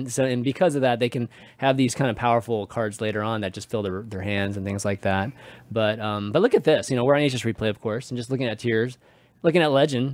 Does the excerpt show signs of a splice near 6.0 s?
no; 0 cuts

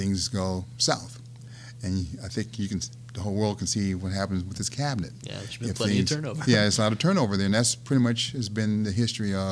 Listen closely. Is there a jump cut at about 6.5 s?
no; 0 cuts

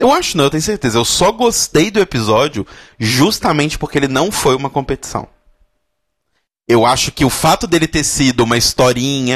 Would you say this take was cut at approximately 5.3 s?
no; 0 cuts

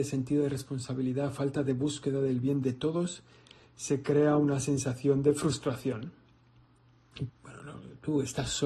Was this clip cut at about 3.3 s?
no; 1 cut; at 7.3 s

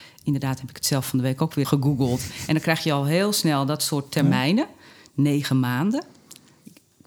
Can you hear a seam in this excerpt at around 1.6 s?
yes; 1 cut; at 1.6 s

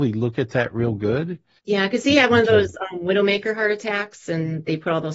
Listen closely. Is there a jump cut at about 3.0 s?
no; 1 cut; at 1.6 s

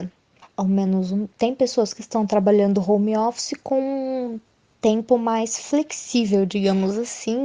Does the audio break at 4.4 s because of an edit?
no; 0 cuts

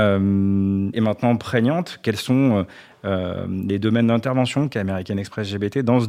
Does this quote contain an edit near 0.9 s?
yes; 1 cut; at 0.9 s

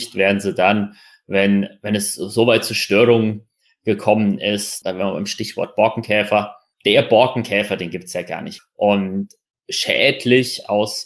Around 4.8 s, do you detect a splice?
yes; 2 cuts; at 4.8 s, 8.6 s

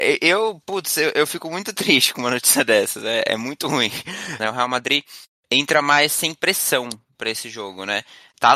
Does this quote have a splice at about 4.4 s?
yes; 1 cut; at 4.4 s

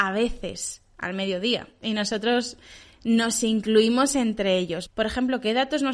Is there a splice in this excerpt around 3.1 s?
no; 2 cuts; at 1.8 s, 4.9 s

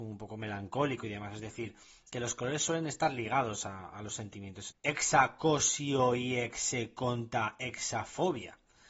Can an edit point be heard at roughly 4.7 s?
yes; 1 cut; at 4.7 s

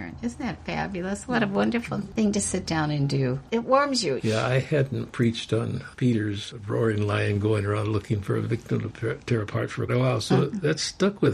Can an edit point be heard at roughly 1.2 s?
no; 2 cuts; at 4.2 s, 9.9 s

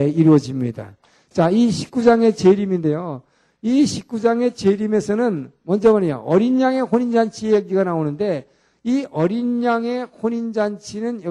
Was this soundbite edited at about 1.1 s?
no; 0 cuts

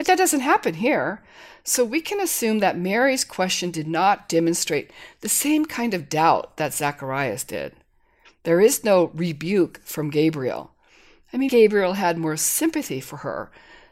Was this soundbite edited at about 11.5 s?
yes; 1 cut; at 11.5 s

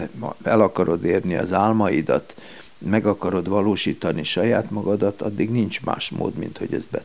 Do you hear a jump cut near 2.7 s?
no; 0 cuts

